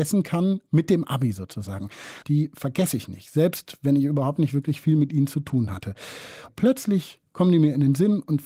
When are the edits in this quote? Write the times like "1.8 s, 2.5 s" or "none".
2.2 s, 6.5 s